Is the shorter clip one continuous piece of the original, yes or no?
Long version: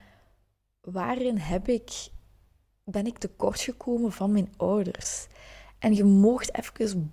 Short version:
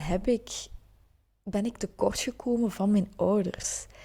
yes